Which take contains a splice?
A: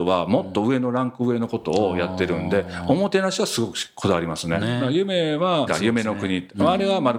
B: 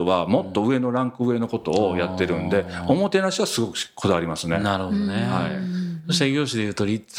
A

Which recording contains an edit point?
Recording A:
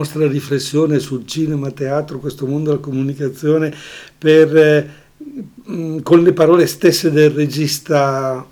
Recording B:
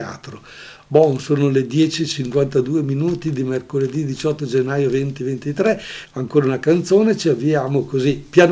B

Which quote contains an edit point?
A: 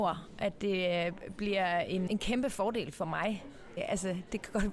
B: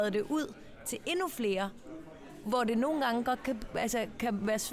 A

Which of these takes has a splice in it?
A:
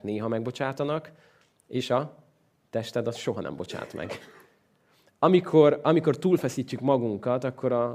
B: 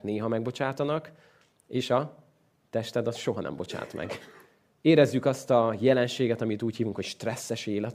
B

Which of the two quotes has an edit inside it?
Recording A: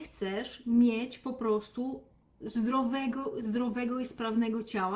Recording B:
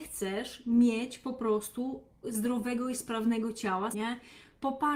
B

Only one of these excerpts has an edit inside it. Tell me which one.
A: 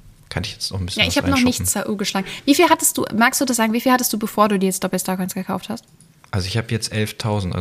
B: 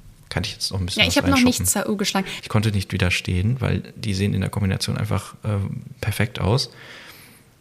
B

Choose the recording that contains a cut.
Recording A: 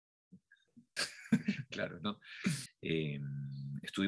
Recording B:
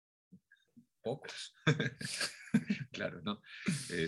A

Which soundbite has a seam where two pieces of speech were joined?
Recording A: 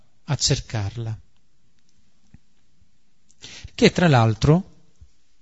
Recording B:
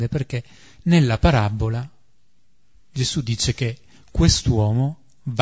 A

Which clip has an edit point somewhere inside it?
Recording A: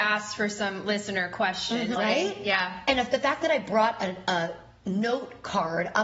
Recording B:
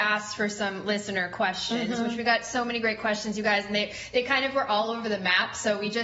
A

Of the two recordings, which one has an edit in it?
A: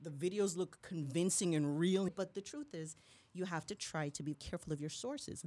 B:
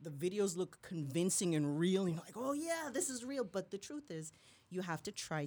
A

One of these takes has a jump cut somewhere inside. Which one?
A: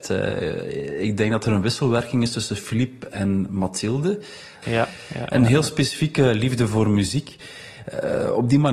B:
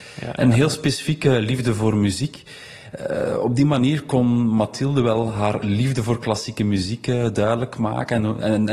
A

